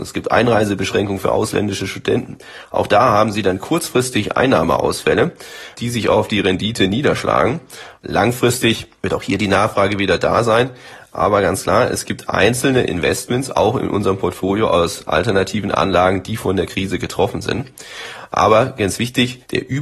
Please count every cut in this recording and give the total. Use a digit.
0